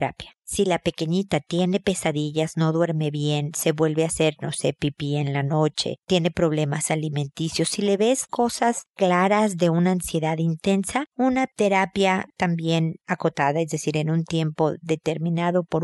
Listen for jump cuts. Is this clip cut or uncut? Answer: uncut